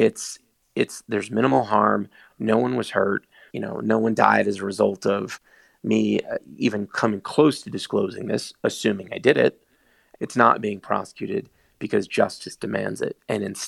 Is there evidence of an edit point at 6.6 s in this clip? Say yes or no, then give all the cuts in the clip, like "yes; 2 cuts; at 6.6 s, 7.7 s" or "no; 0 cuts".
no; 2 cuts; at 3.5 s, 10.1 s